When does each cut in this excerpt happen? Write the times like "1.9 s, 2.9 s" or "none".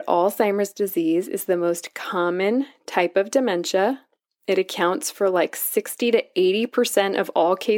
none